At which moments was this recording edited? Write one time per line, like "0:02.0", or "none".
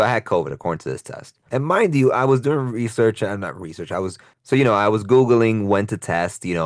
0:01.5